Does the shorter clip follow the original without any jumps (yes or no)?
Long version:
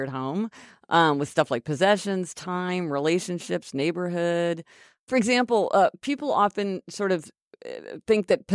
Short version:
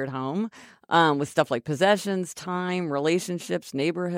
yes